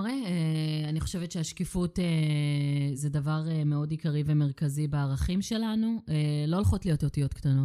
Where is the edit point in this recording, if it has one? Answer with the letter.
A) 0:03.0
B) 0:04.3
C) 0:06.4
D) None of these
A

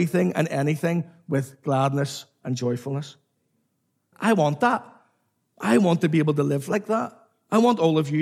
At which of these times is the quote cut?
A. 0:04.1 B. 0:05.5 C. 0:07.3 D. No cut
A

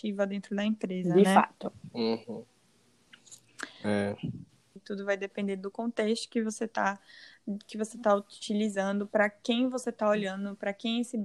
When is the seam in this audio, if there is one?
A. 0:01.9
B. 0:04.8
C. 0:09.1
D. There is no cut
B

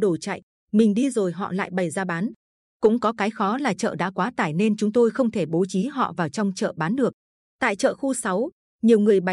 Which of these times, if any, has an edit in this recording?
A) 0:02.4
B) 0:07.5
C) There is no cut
C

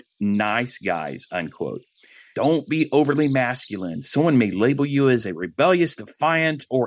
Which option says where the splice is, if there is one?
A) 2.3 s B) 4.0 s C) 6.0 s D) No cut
A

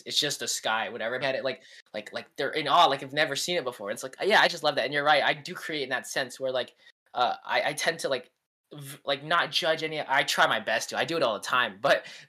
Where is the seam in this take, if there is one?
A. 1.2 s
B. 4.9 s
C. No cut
A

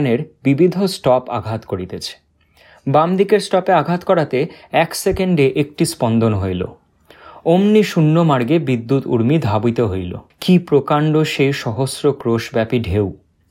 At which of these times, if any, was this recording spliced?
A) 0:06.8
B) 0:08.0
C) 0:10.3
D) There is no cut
C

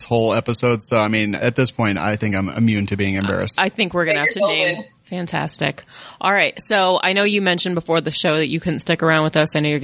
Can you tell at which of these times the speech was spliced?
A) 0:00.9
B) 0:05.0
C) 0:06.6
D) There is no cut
B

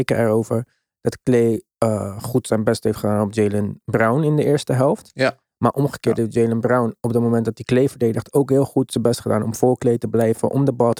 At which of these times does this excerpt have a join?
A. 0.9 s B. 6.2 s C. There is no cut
C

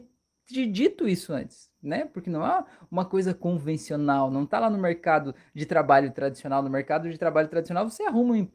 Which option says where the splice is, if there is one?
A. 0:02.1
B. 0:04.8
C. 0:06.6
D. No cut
D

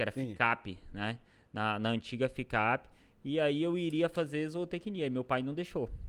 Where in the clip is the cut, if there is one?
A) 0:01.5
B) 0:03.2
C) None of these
C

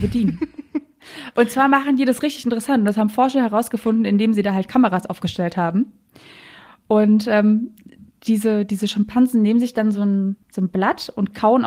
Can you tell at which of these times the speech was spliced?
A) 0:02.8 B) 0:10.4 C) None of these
B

